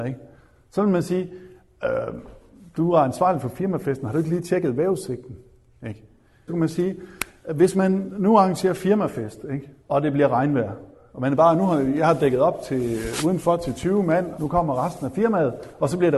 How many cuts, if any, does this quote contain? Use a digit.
3